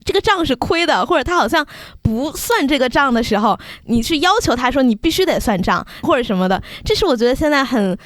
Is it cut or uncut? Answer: cut